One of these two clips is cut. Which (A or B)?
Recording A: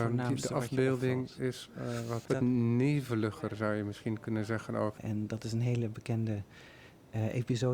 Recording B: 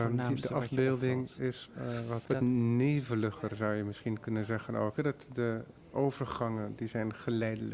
A